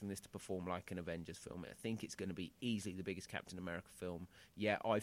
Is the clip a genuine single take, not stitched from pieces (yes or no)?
yes